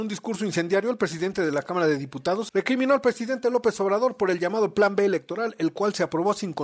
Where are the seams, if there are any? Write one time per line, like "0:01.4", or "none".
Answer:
0:02.5